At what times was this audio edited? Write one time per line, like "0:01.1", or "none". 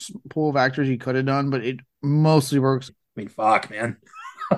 0:02.9

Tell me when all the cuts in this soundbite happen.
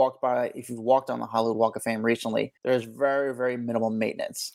0:02.6

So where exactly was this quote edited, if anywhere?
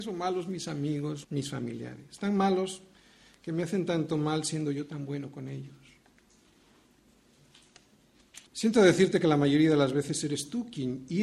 0:01.2
0:08.5

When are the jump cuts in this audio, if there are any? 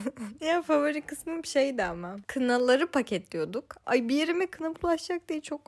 0:03.8

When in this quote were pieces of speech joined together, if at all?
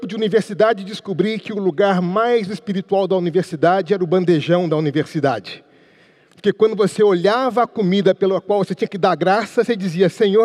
none

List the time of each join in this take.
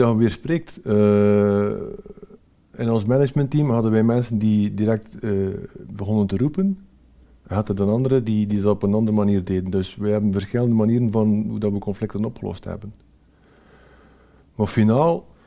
none

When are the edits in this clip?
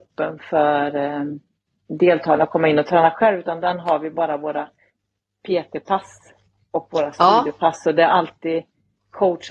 none

